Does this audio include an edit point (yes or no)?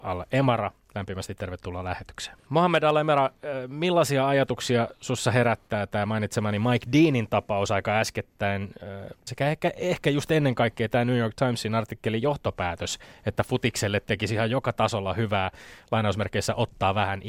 yes